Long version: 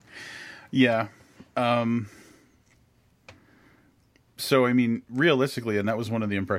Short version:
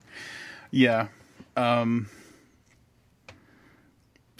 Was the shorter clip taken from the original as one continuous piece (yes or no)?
yes